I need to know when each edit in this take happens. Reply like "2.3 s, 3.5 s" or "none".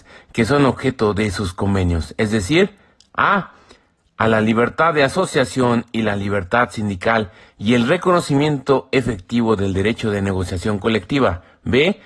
none